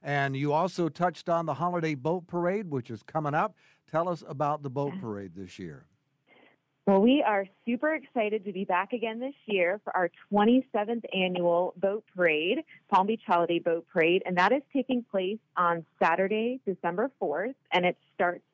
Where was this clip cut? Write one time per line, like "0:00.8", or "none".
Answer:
none